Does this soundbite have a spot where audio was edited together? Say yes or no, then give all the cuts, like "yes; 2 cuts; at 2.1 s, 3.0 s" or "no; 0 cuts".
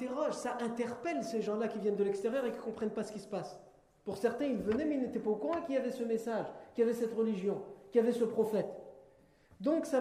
no; 0 cuts